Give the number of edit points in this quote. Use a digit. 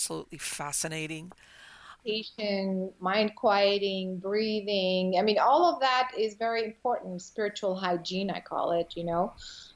1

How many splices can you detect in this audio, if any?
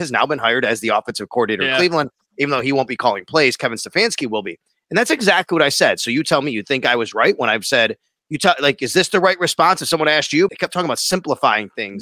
1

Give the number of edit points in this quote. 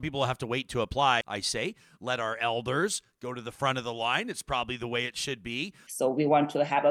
2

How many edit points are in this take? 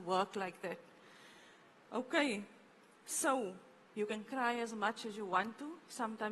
0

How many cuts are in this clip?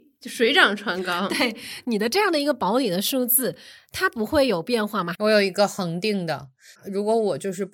2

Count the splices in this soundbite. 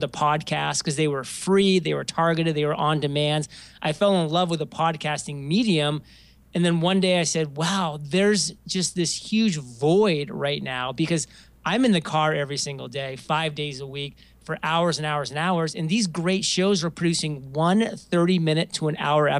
0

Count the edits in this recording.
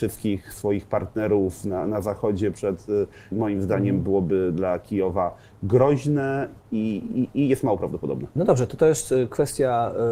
2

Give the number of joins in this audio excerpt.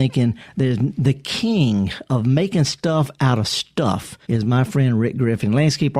1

